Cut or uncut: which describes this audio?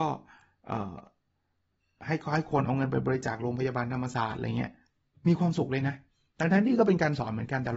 uncut